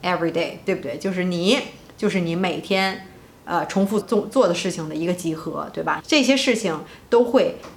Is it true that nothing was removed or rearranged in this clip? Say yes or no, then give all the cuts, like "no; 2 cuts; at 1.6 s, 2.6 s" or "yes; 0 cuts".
no; 2 cuts; at 4.0 s, 6.0 s